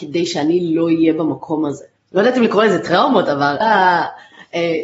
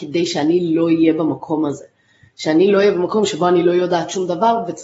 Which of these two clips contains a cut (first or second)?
first